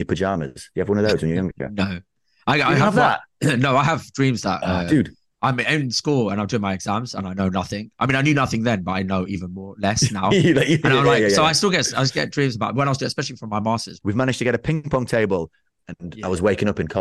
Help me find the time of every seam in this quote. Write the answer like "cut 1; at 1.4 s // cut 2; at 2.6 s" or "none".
cut 1; at 14.0 s // cut 2; at 15.8 s